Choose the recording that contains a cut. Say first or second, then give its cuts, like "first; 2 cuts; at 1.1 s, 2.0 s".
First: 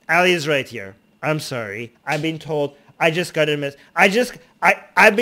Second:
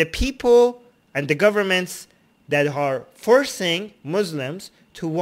first; 1 cut; at 1.9 s